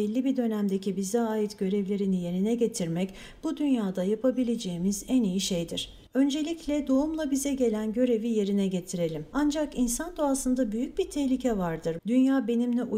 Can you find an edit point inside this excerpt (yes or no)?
yes